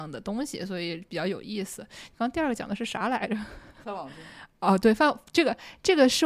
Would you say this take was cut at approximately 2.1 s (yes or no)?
no